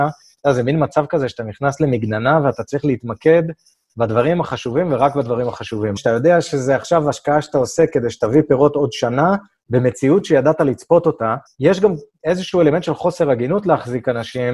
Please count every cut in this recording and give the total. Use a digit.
2